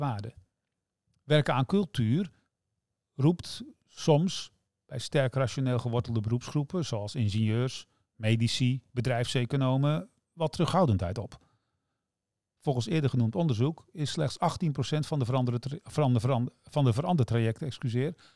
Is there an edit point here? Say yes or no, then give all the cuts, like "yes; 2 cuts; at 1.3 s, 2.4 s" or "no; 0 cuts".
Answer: no; 0 cuts